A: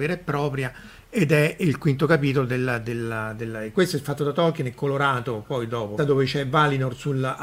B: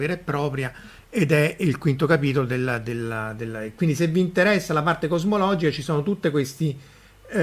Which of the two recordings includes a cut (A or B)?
A